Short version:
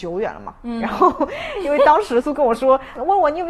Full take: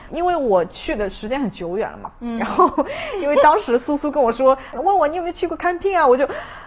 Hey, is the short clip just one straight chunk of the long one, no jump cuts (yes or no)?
no